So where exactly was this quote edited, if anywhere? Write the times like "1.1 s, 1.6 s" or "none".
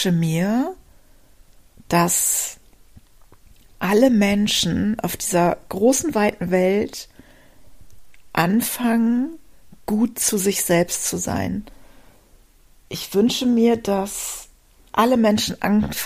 none